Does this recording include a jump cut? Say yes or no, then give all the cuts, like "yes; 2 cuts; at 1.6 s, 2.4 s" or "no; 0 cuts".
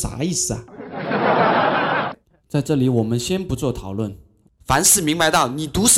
yes; 1 cut; at 4.6 s